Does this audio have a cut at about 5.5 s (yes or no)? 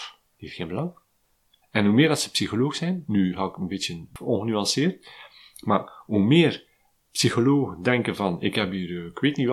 no